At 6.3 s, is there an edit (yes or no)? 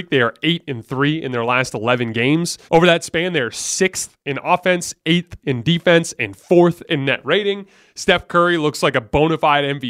no